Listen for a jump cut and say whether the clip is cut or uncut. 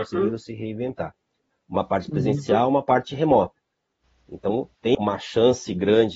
cut